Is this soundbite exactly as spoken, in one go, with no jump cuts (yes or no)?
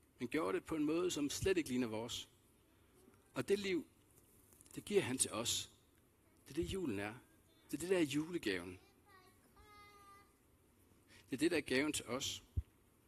no